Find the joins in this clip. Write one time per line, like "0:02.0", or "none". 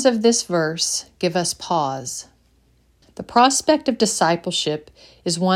0:03.0